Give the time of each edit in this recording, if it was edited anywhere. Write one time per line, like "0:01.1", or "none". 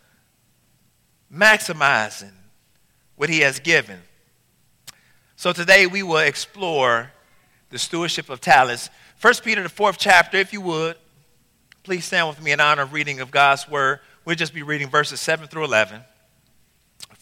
none

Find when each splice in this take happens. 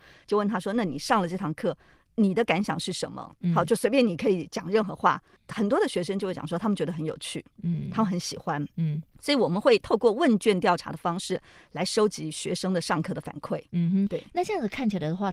0:09.1

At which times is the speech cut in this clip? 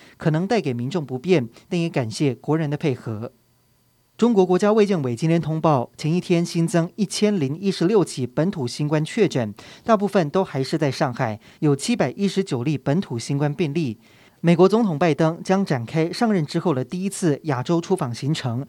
0:14.3

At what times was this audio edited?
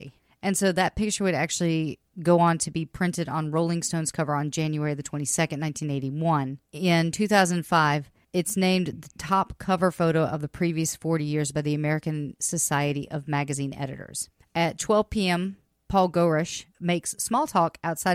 0:16.7

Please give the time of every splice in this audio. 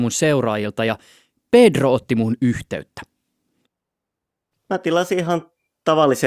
0:04.5

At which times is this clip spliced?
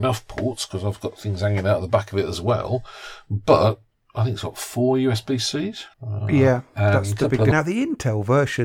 0:05.9
0:07.5

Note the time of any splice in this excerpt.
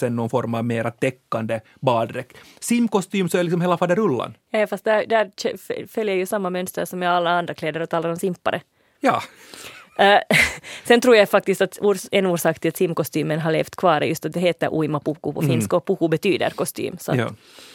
none

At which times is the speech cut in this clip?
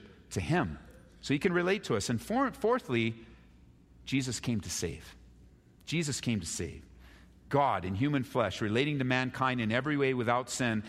none

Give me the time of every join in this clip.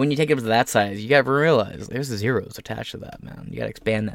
0:01.9

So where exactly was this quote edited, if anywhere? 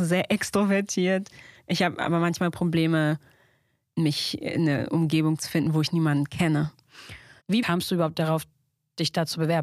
0:07.4

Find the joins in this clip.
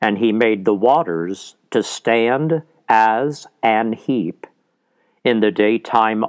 none

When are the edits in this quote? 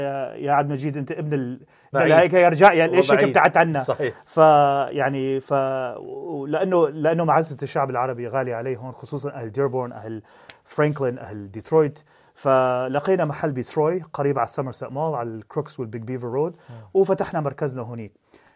0:01.9

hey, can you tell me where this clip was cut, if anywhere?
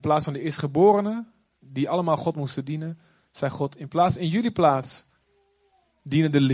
none

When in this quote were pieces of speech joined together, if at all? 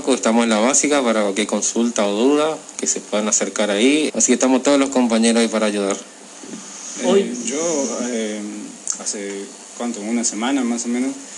0:04.1
0:09.0

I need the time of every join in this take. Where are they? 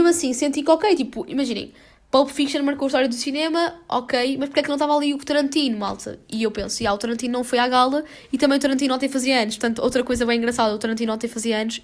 none

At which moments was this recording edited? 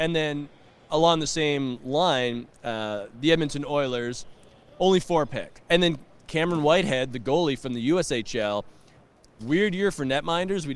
0:05.5
0:09.4

